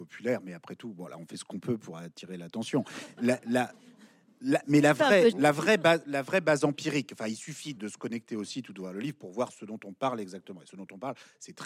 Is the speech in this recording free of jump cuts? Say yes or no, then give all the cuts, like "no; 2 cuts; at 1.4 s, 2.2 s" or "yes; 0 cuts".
no; 2 cuts; at 5.3 s, 7.8 s